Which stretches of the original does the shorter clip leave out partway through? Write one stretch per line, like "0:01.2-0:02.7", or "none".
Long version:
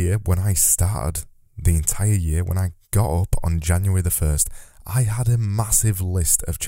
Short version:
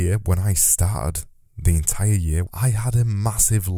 0:02.5-0:04.8